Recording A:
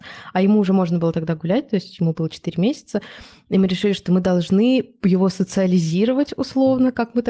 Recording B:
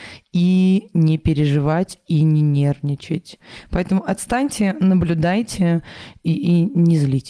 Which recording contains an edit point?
B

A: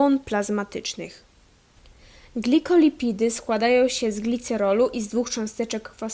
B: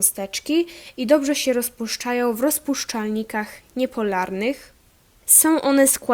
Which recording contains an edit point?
B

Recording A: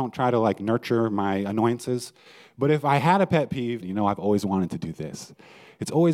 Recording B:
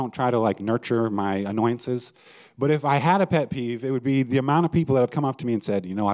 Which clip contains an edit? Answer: A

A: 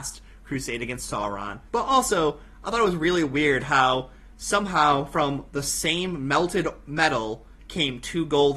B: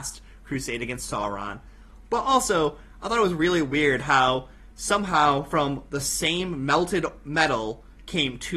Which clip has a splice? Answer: A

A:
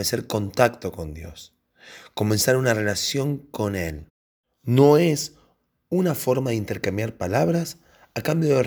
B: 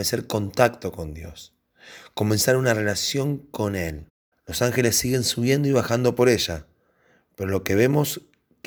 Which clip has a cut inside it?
B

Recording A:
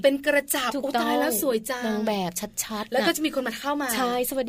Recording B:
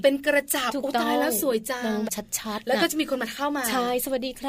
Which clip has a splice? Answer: B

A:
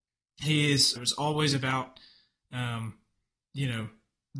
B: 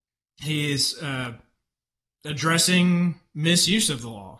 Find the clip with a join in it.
A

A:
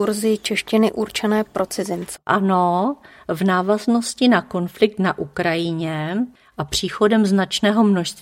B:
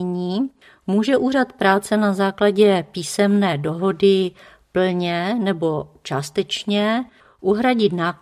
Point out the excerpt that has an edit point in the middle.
A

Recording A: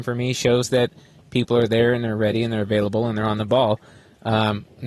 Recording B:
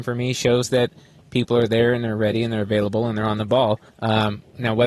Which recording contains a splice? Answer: B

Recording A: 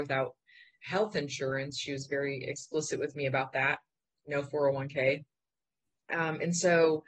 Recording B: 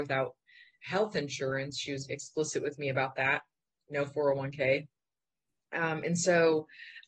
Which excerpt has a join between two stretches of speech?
B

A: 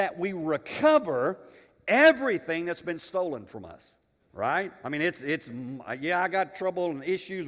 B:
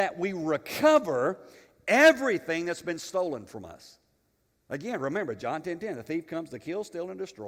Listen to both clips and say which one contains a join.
A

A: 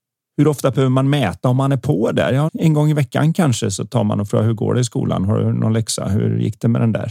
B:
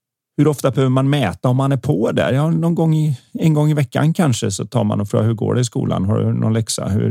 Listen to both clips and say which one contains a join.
A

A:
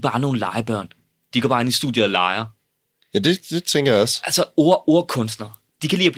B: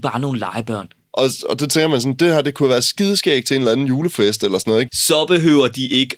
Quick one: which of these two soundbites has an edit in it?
B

